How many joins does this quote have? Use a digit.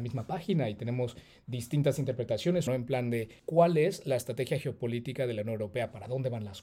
1